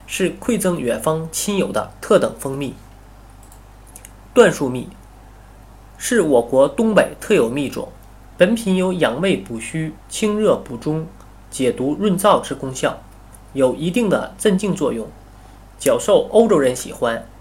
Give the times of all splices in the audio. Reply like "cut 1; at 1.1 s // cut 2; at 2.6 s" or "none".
cut 1; at 8.3 s